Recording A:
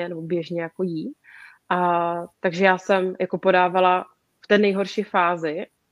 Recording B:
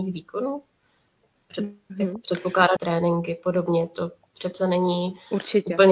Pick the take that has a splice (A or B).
B